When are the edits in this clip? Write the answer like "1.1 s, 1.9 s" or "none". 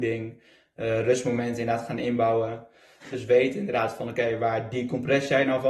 3.1 s